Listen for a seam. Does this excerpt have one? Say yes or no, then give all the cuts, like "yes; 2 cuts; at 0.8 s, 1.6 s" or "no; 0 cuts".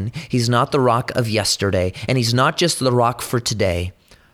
no; 0 cuts